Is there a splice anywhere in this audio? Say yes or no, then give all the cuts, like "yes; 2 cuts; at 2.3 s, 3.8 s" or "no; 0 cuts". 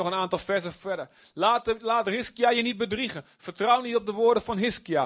no; 0 cuts